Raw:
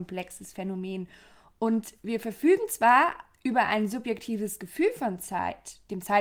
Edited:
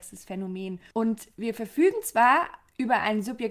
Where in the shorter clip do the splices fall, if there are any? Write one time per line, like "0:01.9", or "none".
0:00.9